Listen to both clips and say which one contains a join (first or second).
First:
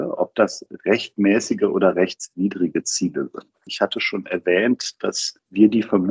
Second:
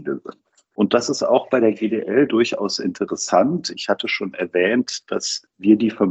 first